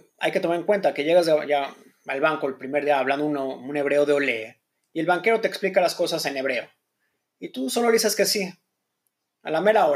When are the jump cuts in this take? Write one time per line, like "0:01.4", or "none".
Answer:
none